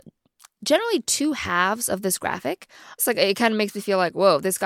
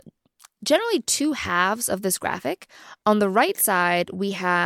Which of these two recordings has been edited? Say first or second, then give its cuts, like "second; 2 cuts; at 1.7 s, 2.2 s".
first; 1 cut; at 3.0 s